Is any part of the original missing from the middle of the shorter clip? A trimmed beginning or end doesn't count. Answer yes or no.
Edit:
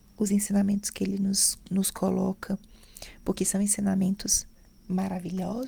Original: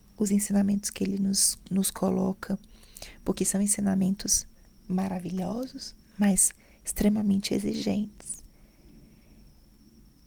no